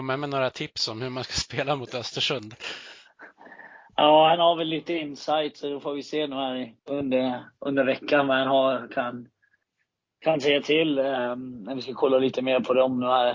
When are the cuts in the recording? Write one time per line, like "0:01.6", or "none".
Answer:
0:06.8